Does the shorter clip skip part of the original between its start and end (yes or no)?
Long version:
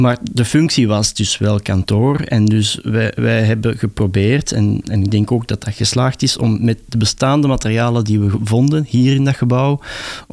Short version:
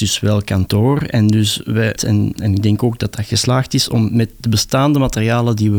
yes